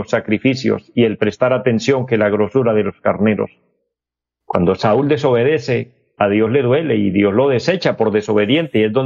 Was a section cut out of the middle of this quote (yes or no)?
no